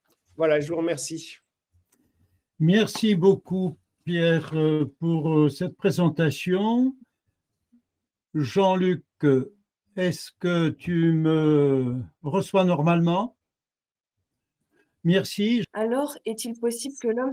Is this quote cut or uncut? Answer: cut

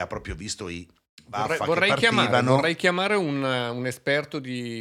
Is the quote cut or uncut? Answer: uncut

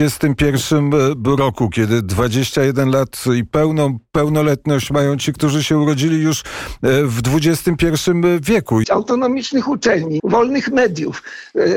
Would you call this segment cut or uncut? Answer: cut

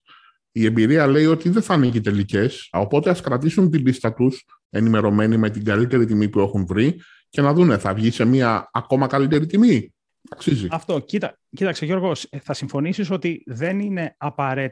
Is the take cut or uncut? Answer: cut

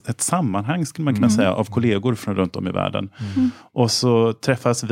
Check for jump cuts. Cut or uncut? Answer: uncut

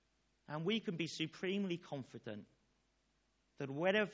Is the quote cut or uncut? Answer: uncut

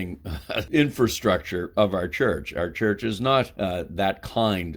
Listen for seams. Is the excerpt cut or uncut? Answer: uncut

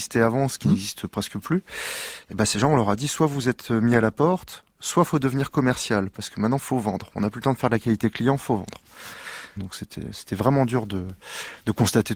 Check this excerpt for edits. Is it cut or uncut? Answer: cut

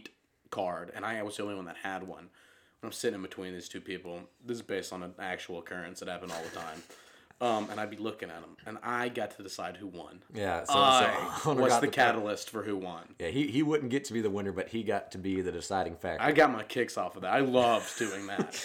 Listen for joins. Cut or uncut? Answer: uncut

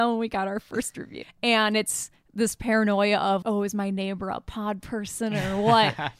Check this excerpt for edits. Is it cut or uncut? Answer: cut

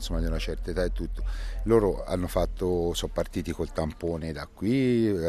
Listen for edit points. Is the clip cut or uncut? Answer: uncut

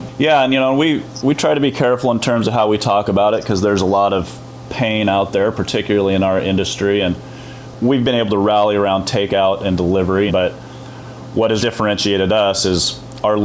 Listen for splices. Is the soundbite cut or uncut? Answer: cut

